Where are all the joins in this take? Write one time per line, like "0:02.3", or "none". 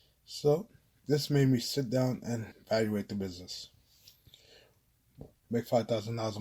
0:02.5
0:05.4